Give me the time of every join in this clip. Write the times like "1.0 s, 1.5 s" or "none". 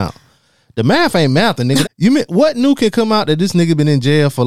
1.8 s